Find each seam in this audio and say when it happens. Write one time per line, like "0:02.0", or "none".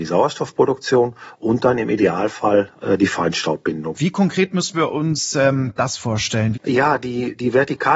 0:03.9
0:06.5